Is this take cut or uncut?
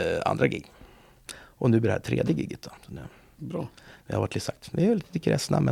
cut